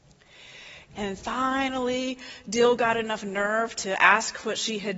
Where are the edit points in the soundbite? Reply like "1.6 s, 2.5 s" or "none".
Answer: 0.9 s

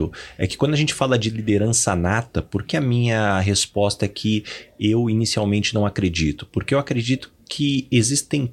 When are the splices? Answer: 2.6 s

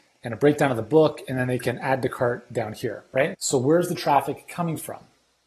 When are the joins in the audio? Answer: 3.3 s

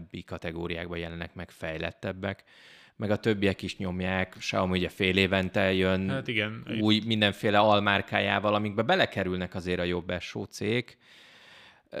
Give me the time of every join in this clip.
none

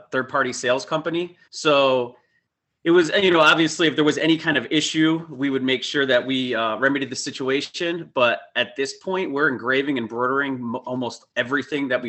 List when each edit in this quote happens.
1.4 s

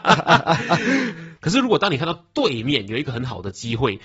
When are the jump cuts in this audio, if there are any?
1.4 s

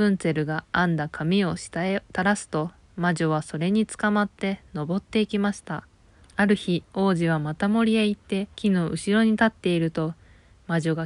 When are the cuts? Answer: 6.2 s, 8.5 s

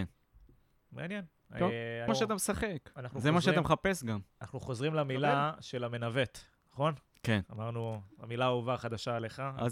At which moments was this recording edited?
2.1 s

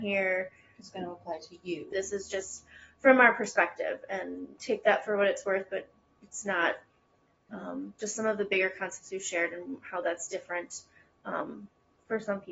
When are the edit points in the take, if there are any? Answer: 1.9 s, 4.6 s, 7.5 s

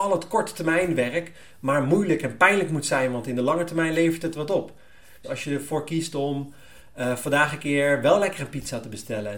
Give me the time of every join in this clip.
5.2 s

